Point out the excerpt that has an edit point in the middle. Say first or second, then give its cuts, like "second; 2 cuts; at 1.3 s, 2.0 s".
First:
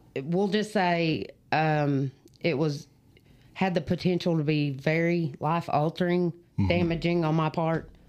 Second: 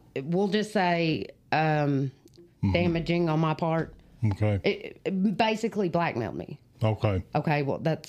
second; 1 cut; at 2.4 s